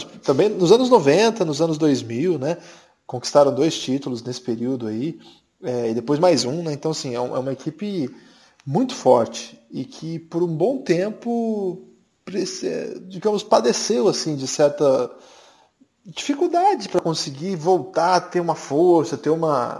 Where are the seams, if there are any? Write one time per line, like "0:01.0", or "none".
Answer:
none